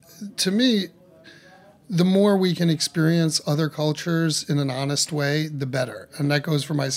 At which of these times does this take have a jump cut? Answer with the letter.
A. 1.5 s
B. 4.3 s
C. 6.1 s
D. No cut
D